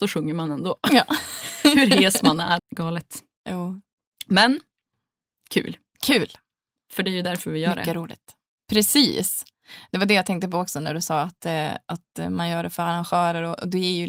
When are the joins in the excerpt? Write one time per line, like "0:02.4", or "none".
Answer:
0:02.6